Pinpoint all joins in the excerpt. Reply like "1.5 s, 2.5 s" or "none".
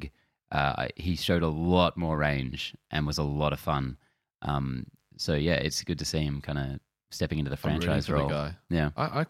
none